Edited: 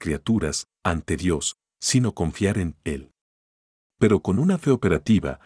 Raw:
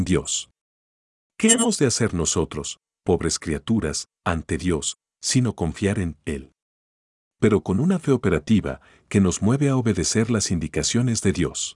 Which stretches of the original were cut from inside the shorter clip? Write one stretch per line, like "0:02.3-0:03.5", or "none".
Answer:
none